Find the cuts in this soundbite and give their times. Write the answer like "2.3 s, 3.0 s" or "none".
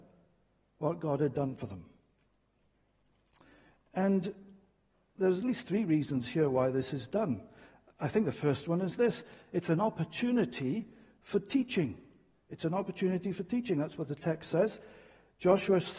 none